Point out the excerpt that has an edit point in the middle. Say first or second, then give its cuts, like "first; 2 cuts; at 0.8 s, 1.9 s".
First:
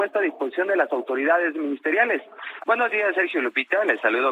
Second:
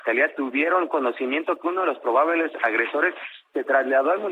first; 1 cut; at 2.6 s